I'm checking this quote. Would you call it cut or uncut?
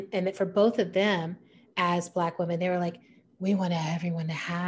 uncut